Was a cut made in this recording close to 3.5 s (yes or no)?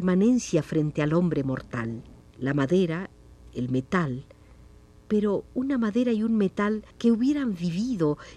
no